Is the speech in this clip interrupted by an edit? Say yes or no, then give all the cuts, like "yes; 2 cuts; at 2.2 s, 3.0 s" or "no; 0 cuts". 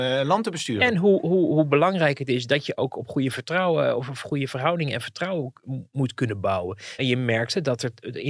yes; 1 cut; at 7.0 s